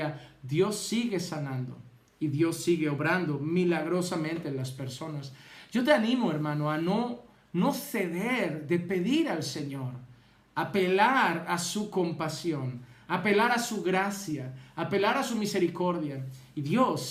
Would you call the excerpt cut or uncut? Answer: uncut